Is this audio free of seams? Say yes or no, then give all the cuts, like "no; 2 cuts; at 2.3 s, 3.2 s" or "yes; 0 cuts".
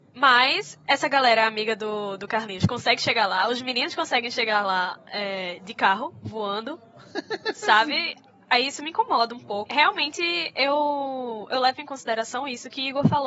no; 1 cut; at 9.7 s